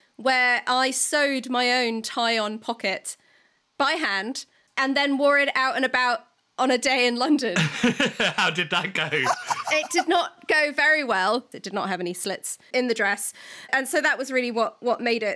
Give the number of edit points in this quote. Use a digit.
1